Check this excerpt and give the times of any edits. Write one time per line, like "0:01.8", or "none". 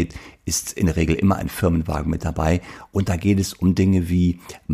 none